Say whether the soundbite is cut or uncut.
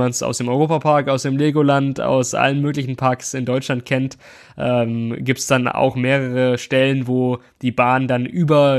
uncut